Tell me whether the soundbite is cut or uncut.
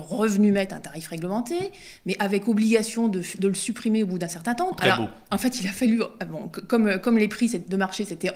cut